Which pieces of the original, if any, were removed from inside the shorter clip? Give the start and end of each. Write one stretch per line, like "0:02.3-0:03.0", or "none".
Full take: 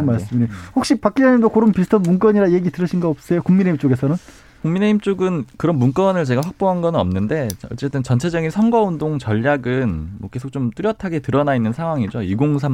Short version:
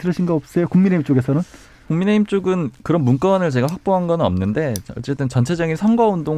none